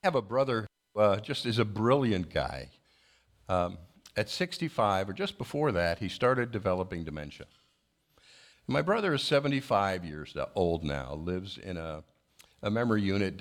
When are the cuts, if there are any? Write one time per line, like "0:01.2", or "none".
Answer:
0:08.5